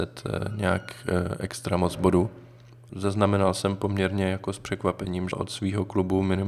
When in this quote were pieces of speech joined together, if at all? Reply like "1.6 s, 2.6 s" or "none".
2.9 s, 5.3 s